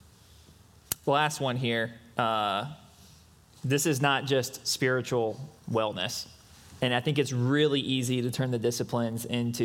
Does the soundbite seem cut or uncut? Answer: cut